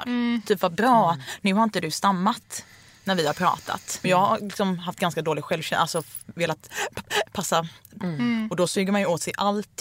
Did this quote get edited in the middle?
yes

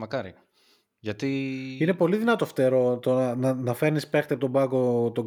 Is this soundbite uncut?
yes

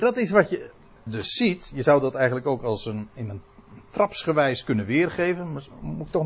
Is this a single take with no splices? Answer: no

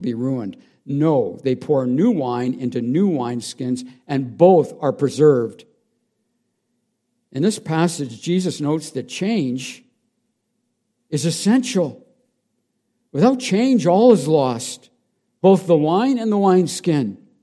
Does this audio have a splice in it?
no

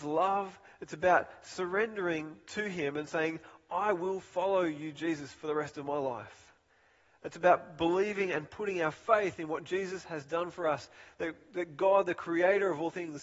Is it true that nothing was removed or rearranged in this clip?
yes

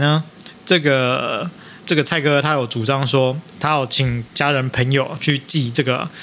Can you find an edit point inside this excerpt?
yes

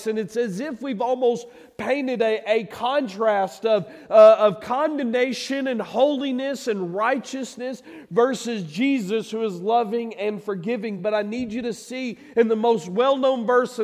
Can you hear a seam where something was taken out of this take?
no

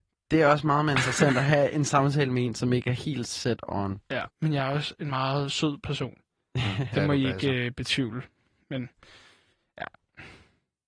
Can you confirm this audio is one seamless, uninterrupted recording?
no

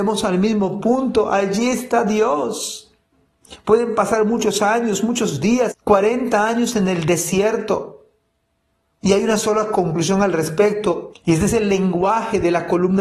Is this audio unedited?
no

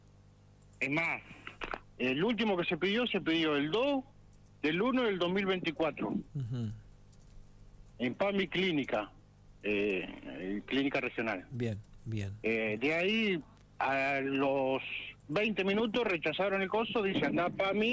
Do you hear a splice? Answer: no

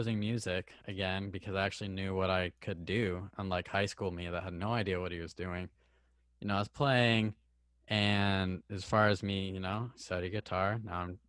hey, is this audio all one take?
yes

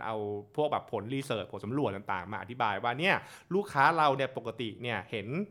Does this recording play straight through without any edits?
yes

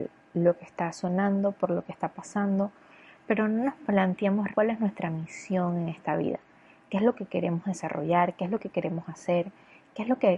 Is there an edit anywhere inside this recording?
yes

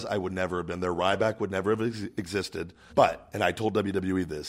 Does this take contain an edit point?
yes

